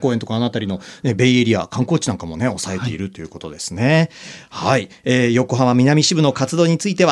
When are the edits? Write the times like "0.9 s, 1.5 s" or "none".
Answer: none